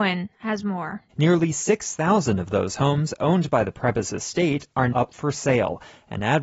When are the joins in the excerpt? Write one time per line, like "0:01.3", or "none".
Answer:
0:01.1
0:04.9